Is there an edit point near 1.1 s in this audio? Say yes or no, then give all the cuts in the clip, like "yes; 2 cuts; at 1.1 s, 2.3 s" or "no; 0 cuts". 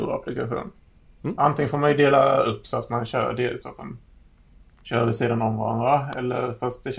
no; 1 cut; at 3.6 s